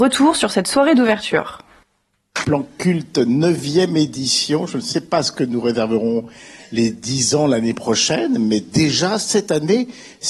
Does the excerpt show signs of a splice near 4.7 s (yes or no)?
no